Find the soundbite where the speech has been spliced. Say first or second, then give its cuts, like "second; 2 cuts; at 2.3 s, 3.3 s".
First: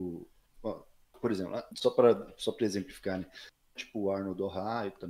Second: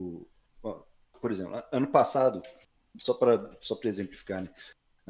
first; 2 cuts; at 1.7 s, 3.8 s